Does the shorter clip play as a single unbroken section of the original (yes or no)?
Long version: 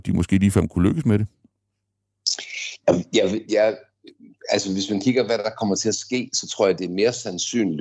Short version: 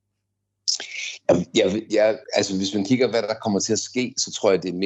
no